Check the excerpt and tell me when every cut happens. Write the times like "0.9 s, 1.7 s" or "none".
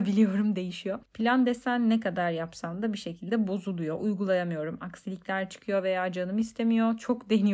1.0 s